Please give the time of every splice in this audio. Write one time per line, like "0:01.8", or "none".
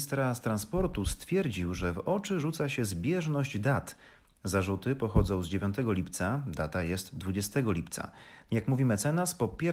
0:08.5